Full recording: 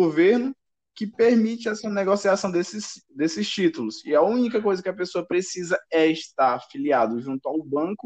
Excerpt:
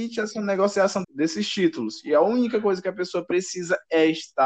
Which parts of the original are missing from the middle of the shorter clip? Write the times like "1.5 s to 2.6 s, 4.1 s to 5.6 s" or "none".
2.5 s to 3.0 s